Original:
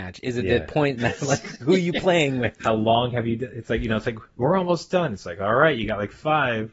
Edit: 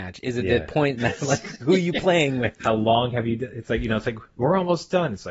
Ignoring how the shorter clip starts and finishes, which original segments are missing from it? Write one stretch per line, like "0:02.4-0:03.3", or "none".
none